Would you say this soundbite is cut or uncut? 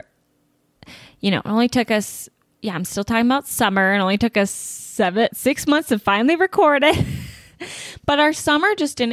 cut